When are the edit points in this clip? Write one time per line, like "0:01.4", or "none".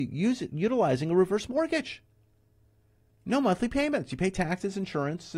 none

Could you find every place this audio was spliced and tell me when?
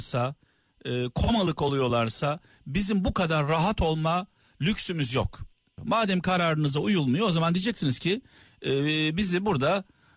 0:05.8

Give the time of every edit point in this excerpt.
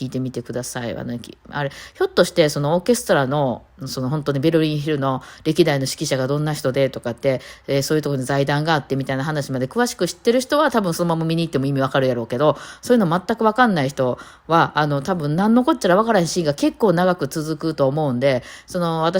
none

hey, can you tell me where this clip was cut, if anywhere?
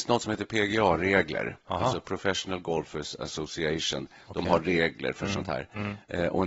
none

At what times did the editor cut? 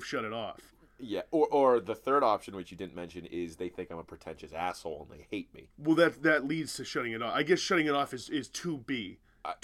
none

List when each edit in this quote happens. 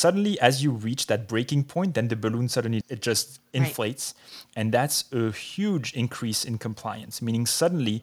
0:02.8

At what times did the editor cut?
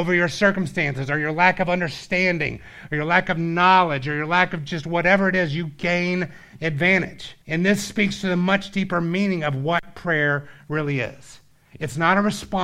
0:07.4

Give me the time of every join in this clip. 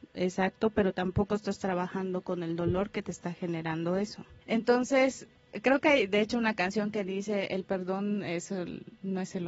0:04.4

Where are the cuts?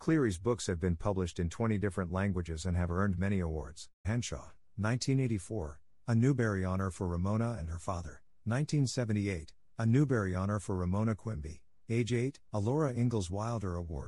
0:04.0
0:12.5

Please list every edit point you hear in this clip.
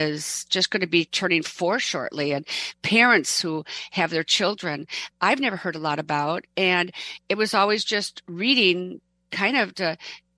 0:05.1

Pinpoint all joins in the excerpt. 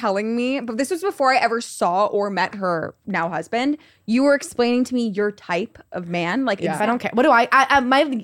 0:06.8

